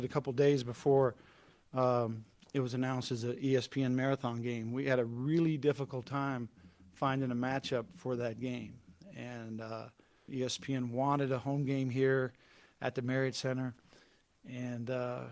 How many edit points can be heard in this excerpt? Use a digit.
1